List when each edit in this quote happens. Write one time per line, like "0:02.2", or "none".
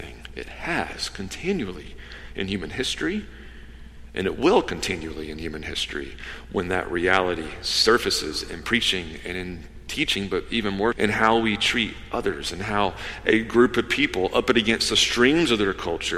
0:10.9